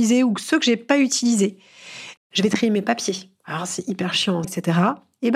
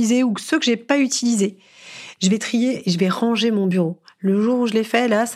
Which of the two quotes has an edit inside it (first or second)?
first